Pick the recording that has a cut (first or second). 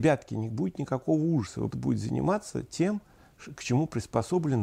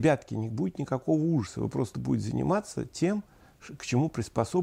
first